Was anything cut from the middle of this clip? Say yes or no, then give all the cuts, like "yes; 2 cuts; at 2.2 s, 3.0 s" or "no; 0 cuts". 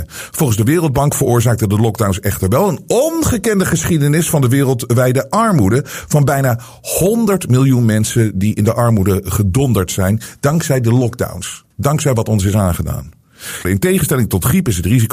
yes; 1 cut; at 13.6 s